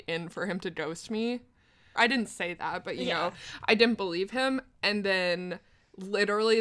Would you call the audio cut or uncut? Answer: cut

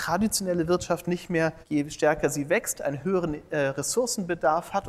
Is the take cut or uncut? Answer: cut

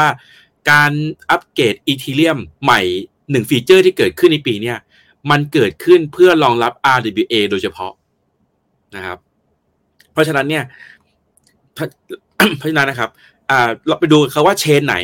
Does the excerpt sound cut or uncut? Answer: cut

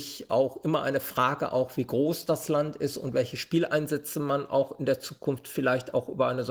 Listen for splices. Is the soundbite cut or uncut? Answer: uncut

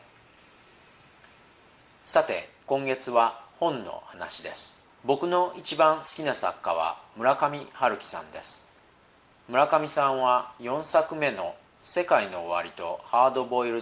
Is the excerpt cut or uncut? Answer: cut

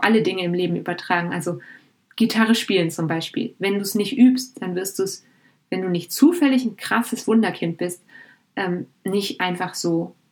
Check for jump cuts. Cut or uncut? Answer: uncut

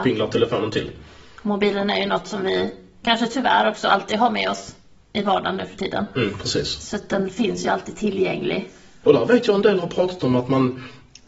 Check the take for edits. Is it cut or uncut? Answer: cut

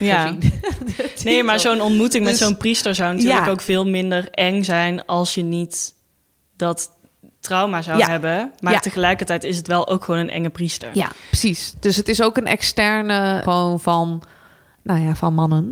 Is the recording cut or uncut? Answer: cut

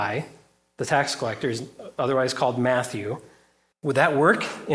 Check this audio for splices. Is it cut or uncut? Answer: cut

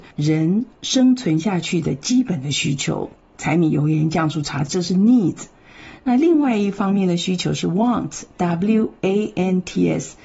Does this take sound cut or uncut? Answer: uncut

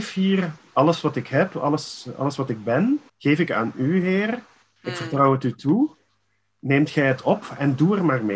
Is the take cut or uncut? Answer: cut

